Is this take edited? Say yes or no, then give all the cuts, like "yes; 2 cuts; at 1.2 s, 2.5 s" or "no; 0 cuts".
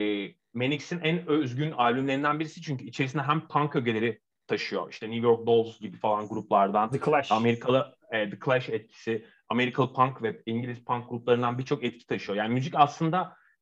no; 0 cuts